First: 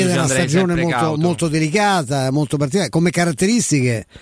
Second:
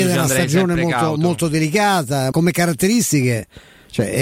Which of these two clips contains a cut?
second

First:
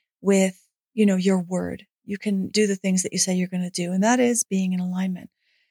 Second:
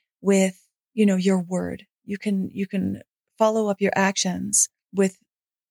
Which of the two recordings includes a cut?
first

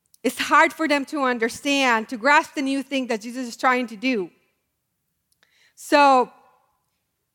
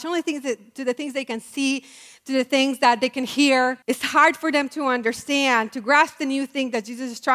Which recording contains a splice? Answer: second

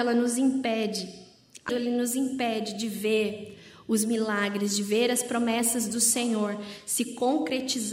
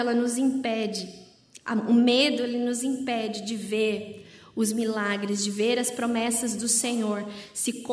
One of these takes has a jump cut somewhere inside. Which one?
first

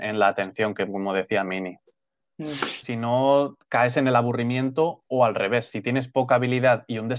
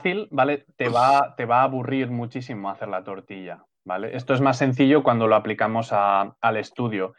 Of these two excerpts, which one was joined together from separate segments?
first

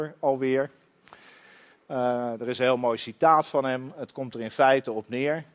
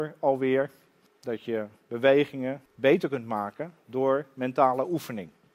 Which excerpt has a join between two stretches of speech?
second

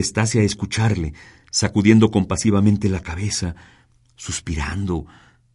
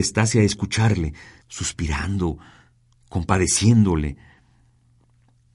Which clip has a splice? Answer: second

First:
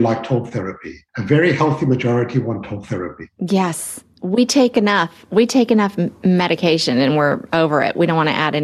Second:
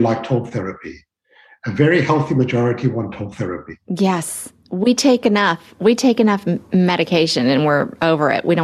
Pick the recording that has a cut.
first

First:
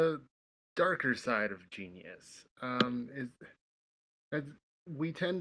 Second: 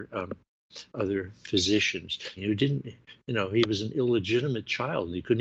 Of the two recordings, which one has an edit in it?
second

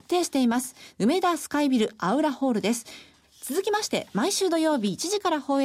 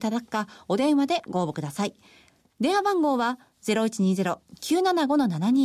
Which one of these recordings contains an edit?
first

